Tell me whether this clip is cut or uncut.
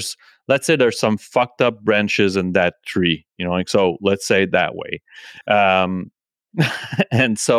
uncut